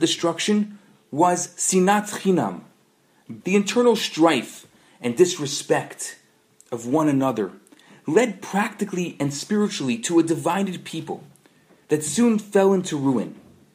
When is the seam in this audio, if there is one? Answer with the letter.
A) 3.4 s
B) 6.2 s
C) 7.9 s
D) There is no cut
A